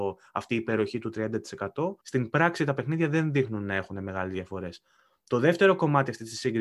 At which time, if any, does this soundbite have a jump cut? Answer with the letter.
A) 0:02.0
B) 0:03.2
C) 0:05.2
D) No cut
A